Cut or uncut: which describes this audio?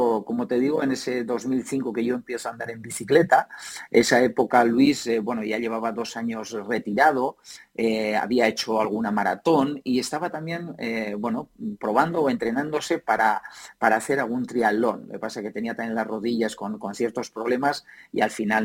uncut